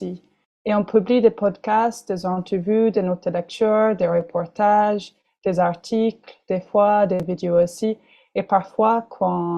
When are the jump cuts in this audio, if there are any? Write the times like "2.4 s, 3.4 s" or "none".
none